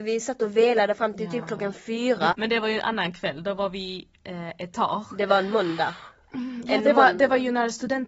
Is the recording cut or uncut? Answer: cut